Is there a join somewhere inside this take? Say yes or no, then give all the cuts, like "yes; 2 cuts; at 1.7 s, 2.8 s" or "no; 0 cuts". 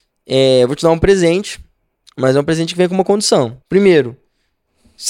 yes; 1 cut; at 3.6 s